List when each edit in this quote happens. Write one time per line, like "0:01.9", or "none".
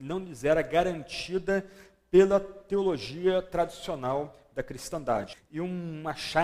0:05.3